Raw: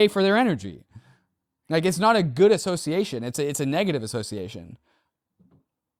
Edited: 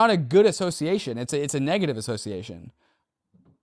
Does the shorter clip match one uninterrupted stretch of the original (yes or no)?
yes